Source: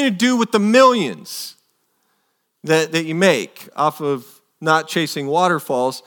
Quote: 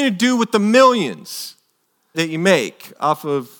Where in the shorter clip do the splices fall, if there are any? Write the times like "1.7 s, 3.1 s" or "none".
2.1 s

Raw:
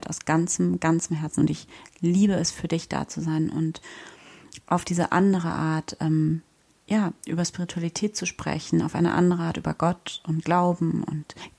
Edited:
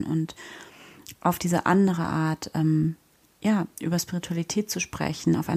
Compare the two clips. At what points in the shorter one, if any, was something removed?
none

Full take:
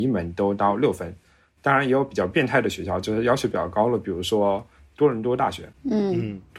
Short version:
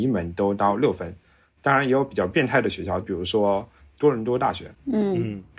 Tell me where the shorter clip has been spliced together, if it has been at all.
3.0 s

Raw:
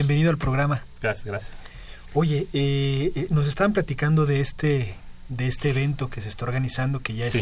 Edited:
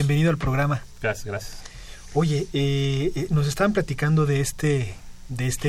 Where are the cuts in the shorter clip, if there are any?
none

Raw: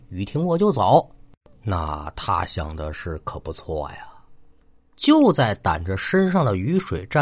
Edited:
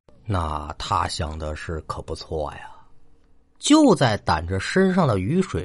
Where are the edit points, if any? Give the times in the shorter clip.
none

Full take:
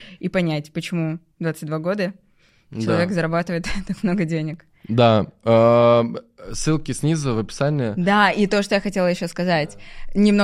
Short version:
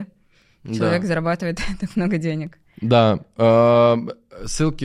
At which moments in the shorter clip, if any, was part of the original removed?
none

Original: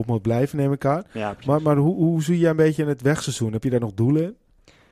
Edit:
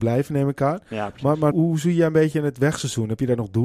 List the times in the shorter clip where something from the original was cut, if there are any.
1.5 s

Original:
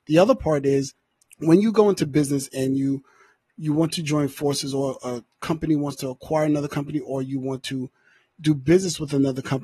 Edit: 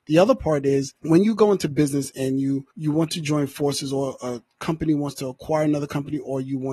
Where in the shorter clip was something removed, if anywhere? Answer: 1.0 s, 2.7 s

